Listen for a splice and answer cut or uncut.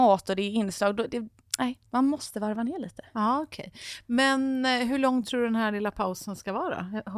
uncut